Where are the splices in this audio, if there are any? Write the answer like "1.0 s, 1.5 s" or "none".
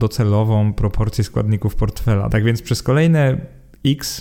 2.3 s